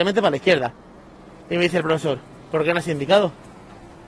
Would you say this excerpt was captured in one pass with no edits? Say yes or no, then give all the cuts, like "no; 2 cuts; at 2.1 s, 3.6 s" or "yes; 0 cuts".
yes; 0 cuts